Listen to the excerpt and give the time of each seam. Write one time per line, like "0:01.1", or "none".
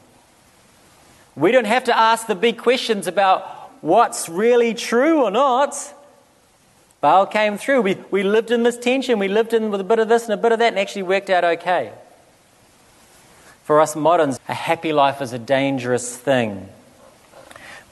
0:14.4